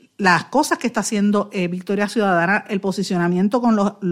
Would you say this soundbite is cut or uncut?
uncut